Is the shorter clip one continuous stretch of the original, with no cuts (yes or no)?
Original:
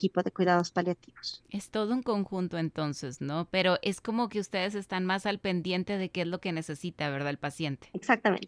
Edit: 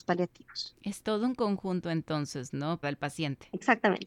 no